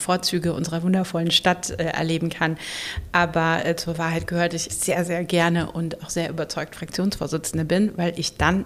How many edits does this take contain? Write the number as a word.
one